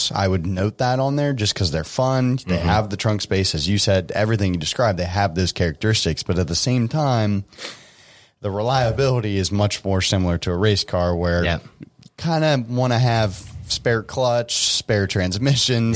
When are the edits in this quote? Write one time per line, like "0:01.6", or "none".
none